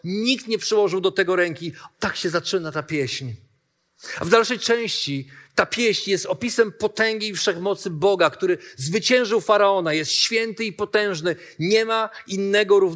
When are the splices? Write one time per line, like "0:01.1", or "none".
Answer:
0:01.9